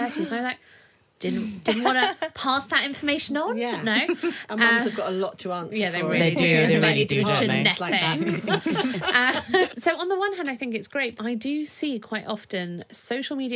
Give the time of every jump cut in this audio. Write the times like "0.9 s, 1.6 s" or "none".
9.7 s, 11.2 s